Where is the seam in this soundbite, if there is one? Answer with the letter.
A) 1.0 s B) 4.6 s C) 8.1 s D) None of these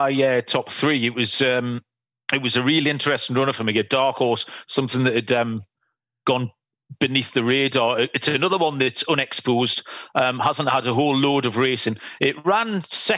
D